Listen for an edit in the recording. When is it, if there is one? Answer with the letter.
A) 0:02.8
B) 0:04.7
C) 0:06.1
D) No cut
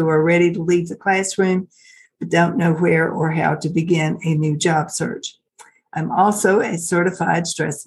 D